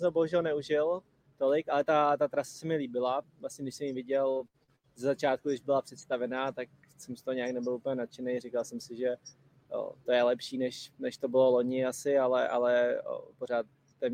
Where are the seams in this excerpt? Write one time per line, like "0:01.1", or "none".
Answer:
none